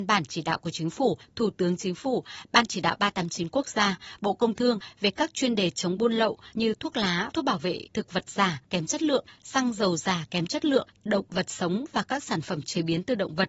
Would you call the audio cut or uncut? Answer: cut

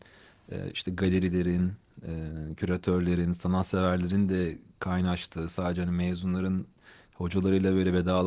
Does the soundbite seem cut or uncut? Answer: uncut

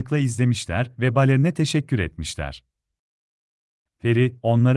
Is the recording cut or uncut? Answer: cut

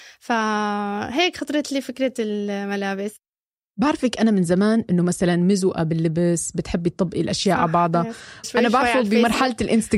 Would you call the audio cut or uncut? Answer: cut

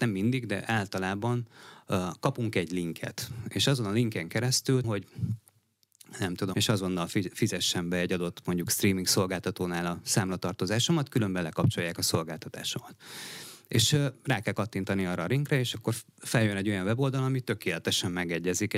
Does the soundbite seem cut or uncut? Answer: cut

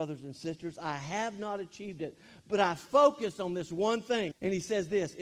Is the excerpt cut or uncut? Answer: cut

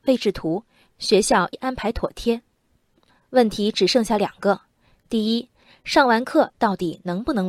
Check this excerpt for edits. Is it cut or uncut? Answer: cut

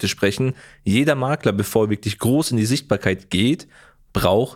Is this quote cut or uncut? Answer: uncut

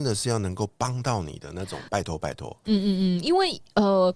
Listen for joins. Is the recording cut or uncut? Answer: cut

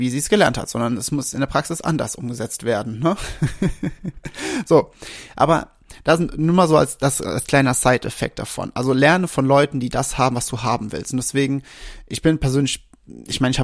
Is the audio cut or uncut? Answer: uncut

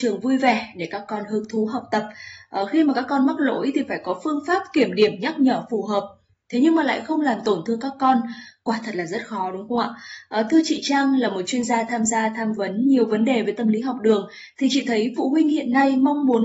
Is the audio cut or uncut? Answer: uncut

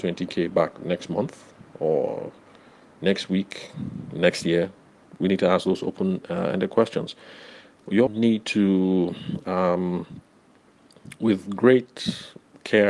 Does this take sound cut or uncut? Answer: cut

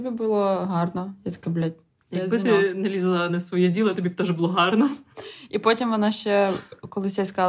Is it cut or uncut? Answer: uncut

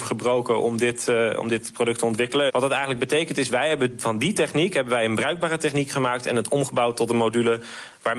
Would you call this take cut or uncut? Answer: cut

